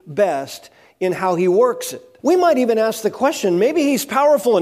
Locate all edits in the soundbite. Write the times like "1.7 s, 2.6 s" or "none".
2.2 s